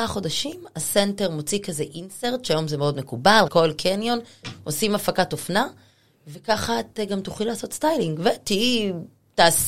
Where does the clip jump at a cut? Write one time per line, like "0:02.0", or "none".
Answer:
0:03.5